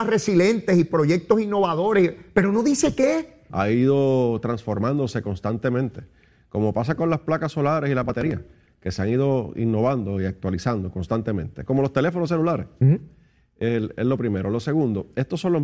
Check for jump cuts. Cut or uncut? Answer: cut